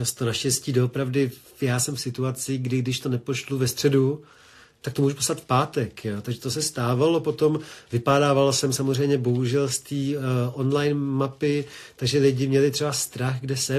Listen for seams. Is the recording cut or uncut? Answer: uncut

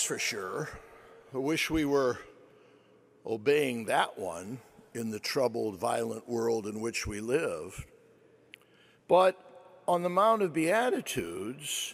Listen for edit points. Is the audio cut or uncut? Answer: uncut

